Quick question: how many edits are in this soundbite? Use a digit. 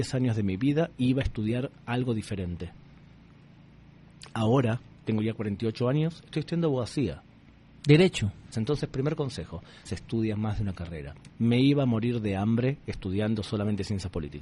3